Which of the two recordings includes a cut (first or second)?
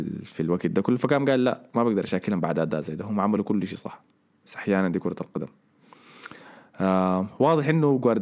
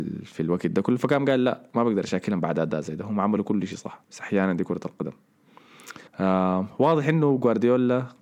second